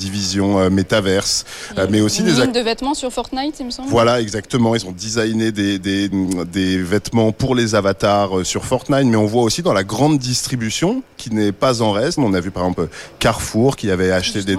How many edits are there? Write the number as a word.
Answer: three